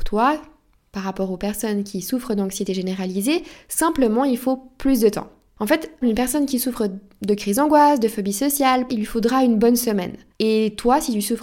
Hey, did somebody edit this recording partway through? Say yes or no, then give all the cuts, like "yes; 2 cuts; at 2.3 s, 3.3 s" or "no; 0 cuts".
yes; 2 cuts; at 6.0 s, 8.9 s